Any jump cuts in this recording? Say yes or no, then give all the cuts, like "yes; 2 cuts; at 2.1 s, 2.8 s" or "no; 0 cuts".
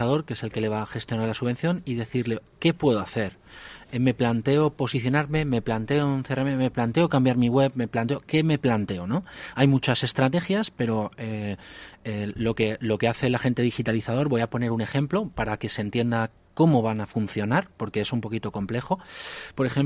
no; 0 cuts